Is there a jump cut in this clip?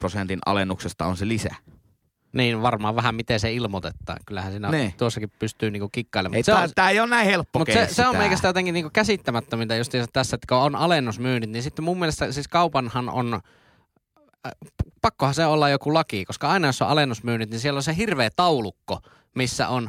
no; 0 cuts

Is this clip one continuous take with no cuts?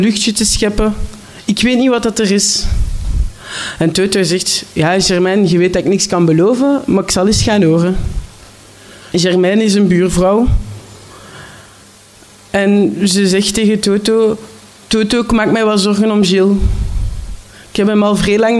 no; 1 cut; at 9.1 s

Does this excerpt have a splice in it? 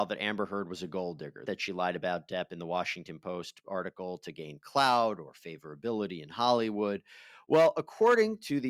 yes; 1 cut; at 1.5 s

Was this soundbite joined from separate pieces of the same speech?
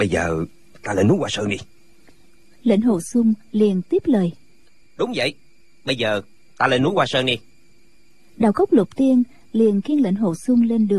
no; 0 cuts

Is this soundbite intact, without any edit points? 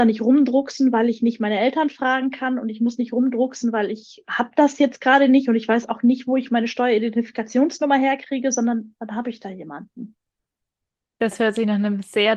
yes; 0 cuts

